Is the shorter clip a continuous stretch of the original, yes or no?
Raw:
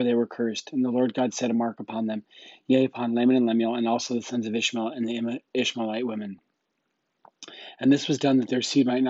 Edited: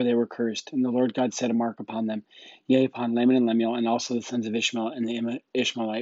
yes